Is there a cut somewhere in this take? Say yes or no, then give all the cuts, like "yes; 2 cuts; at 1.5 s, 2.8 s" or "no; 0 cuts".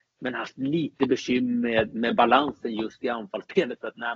yes; 1 cut; at 1.9 s